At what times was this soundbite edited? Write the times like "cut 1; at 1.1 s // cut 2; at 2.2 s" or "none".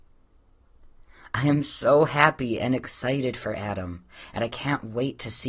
none